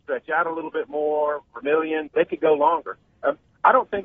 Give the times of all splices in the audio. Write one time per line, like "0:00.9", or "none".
0:02.1